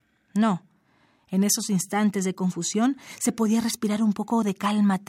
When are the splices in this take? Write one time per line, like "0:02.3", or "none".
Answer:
none